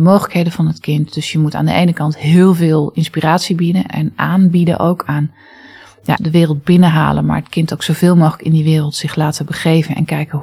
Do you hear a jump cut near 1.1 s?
no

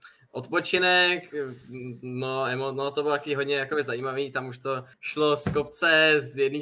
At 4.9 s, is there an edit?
yes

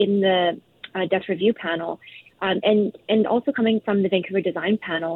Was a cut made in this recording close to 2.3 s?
yes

